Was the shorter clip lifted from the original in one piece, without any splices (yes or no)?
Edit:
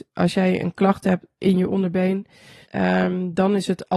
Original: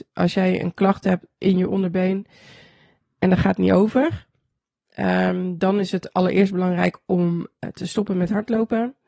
no